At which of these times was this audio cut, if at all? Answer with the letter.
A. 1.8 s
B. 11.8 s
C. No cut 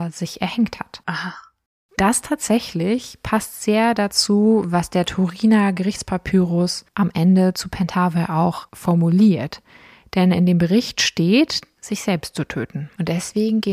B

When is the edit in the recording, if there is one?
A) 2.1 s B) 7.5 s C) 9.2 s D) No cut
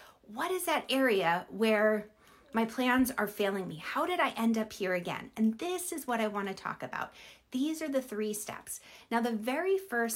D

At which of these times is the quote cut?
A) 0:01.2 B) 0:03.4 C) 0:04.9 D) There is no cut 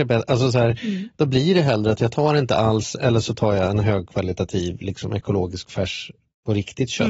D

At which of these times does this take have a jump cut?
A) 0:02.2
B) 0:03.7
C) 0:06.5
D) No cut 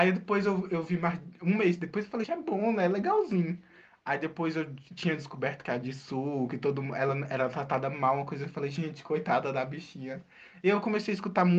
A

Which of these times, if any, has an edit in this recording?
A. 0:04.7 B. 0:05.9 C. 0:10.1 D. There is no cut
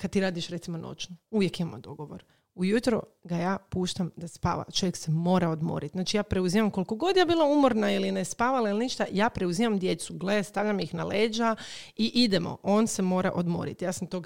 D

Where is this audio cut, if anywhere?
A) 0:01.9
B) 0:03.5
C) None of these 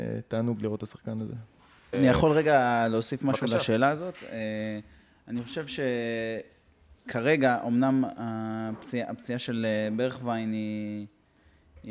A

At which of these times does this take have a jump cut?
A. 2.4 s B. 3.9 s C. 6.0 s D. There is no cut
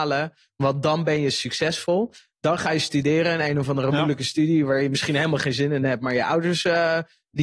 D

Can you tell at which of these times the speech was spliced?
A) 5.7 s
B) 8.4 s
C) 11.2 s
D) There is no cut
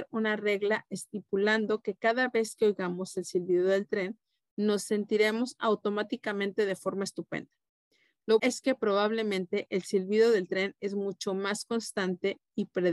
B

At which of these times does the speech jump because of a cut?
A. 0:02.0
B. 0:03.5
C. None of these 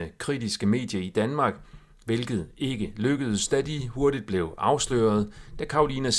C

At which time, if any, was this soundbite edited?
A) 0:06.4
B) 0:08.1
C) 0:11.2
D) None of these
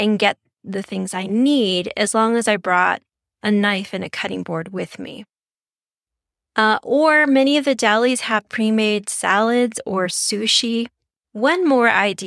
C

